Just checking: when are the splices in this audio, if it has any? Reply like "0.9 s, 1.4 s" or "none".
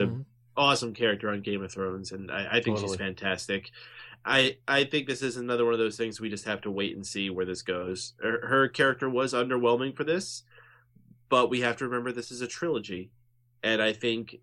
none

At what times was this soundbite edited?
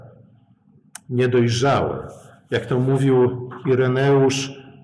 none

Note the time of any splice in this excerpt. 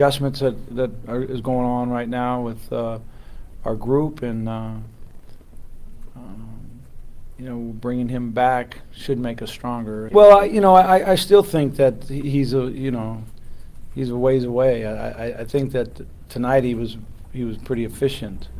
10.1 s

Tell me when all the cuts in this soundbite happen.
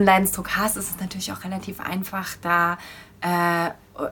none

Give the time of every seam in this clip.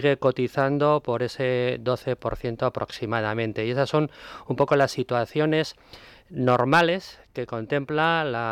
none

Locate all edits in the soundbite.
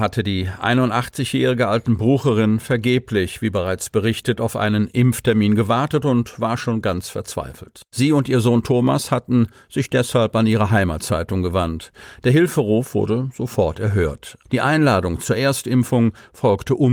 7.9 s, 14.4 s

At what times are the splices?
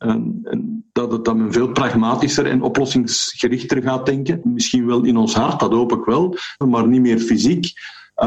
0.9 s, 4.4 s, 6.6 s

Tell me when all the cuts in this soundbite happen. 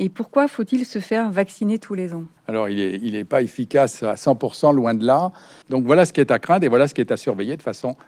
2.4 s, 5.6 s

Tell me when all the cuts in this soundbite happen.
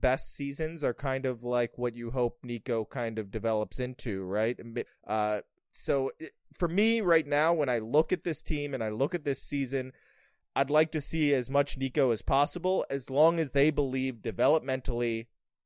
4.9 s

